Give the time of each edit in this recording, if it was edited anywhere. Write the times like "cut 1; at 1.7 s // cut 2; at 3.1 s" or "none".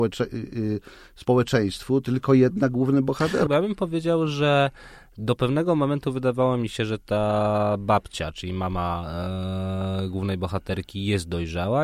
cut 1; at 3.5 s